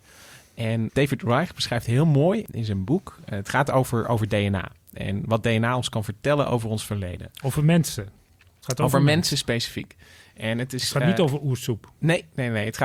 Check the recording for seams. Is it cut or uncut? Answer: uncut